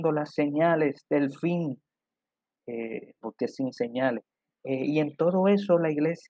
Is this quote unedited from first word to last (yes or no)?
no